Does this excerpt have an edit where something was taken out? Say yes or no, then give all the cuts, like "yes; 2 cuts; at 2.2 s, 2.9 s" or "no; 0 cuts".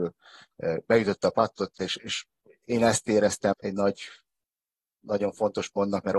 yes; 2 cuts; at 1.8 s, 3.5 s